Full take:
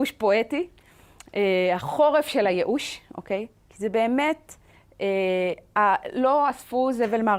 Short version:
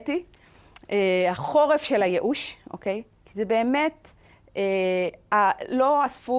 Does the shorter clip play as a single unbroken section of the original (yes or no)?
yes